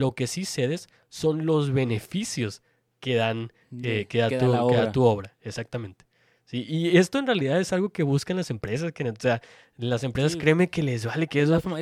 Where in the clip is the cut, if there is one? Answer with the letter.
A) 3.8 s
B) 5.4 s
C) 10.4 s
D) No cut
D